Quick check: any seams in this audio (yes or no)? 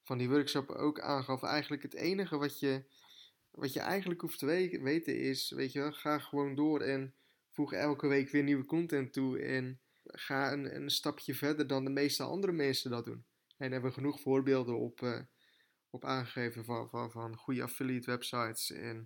yes